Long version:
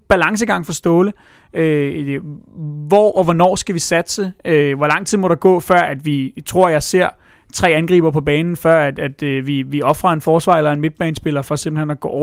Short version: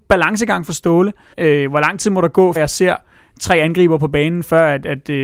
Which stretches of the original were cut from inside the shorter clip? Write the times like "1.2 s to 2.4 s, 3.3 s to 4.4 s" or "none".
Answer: 1.3 s to 4.4 s, 5.6 s to 6.7 s